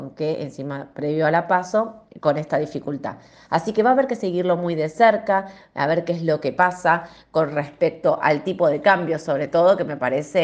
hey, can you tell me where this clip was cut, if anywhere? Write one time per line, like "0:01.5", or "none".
none